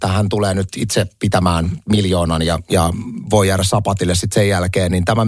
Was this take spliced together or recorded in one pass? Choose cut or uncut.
uncut